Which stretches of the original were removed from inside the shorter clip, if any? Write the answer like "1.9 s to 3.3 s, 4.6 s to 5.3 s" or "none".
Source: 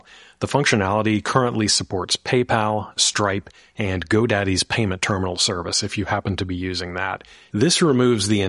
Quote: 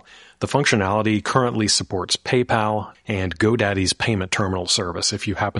2.9 s to 3.7 s